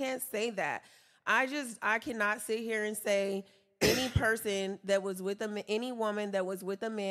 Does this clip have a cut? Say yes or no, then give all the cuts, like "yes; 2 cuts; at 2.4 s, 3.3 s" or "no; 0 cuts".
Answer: no; 0 cuts